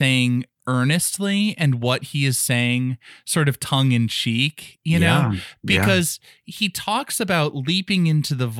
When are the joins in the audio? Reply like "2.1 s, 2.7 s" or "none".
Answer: none